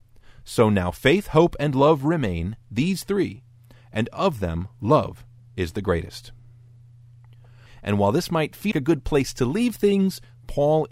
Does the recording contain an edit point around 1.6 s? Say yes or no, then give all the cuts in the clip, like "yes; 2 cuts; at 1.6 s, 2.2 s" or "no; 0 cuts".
no; 2 cuts; at 7.7 s, 8.7 s